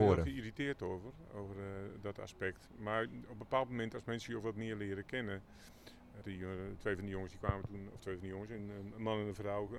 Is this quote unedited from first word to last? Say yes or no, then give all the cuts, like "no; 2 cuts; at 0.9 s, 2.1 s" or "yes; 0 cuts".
no; 1 cut; at 6.2 s